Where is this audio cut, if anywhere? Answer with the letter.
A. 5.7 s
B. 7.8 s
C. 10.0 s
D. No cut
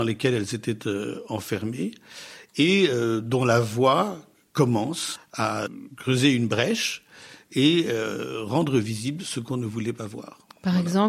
D